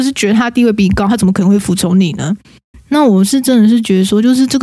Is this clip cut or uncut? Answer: cut